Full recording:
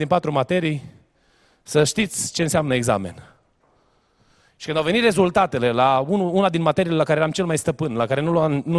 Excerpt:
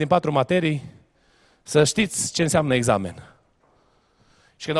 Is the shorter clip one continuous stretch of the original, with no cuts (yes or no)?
yes